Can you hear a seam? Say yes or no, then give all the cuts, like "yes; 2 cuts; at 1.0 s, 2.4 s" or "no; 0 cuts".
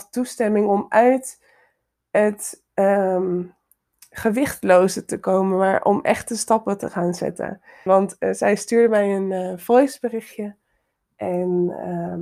yes; 1 cut; at 7.9 s